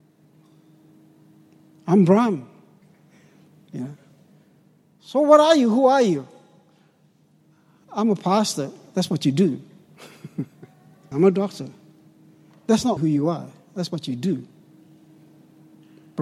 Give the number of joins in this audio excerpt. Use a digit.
3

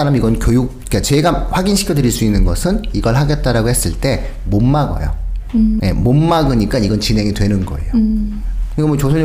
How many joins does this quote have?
1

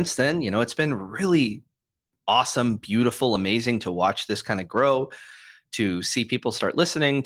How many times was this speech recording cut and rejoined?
0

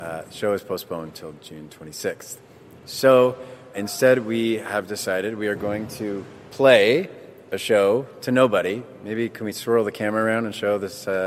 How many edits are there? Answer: 1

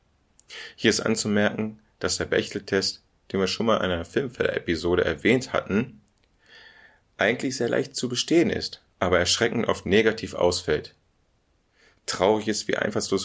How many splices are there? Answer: 1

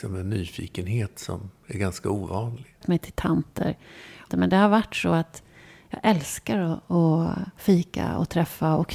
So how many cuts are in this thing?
2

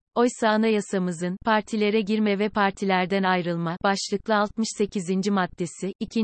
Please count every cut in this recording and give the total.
1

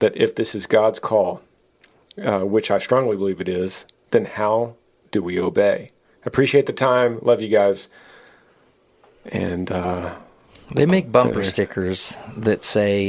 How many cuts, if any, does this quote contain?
0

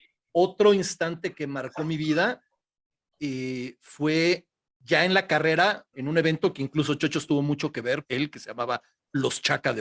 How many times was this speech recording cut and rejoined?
2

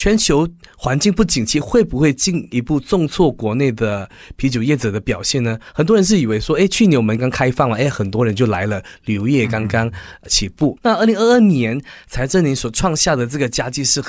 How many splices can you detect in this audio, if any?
2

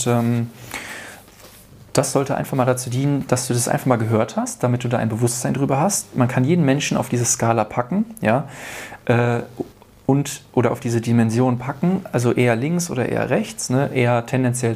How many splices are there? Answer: 0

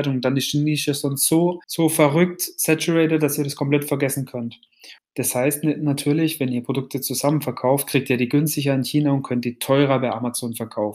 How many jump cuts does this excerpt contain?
2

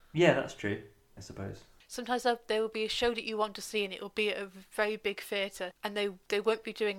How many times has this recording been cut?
2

